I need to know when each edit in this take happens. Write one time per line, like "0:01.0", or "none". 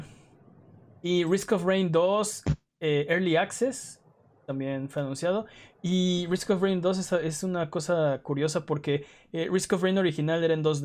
none